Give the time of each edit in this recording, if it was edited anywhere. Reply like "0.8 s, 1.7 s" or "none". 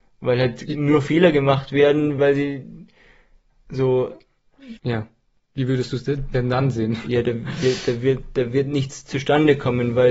2.2 s, 4.8 s